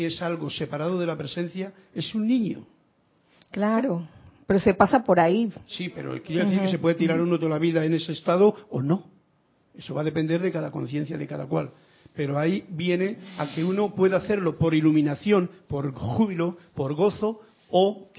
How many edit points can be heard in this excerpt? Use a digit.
0